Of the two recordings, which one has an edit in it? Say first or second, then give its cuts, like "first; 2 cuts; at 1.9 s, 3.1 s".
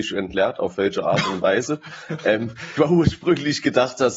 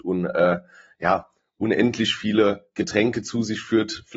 first; 1 cut; at 2.8 s